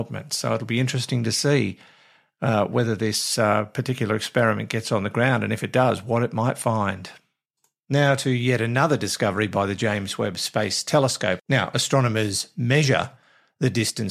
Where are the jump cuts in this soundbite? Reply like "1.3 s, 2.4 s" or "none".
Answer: 11.4 s